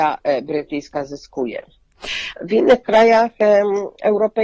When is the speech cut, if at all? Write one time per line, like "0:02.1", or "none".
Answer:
0:02.3